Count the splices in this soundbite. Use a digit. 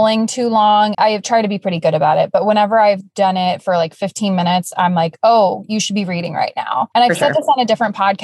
1